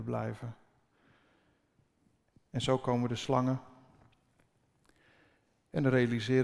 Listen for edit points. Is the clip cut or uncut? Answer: uncut